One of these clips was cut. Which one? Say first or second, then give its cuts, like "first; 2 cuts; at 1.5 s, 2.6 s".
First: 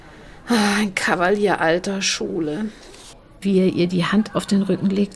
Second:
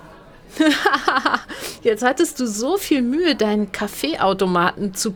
first; 1 cut; at 3.4 s